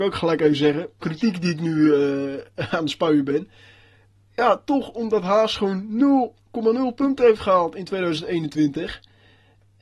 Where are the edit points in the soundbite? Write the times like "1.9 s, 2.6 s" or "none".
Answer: 1.0 s